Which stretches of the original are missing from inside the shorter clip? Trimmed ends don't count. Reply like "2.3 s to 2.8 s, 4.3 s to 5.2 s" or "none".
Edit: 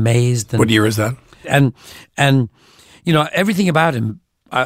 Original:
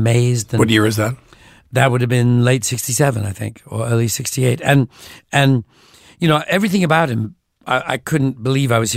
1.4 s to 4.6 s